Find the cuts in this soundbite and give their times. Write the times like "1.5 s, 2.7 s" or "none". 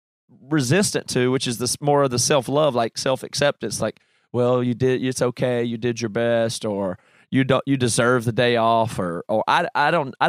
none